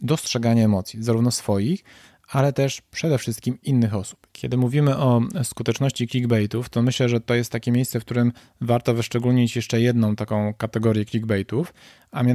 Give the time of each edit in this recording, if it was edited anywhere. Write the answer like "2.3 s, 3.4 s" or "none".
4.3 s